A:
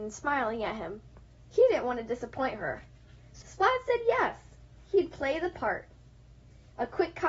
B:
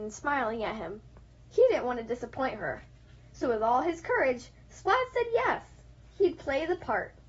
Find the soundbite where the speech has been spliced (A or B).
A